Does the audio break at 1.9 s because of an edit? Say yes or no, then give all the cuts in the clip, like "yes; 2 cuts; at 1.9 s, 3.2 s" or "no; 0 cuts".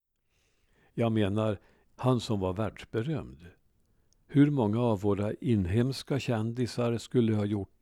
yes; 1 cut; at 1.9 s